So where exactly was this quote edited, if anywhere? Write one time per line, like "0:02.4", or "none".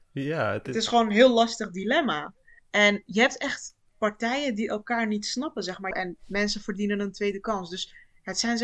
0:05.9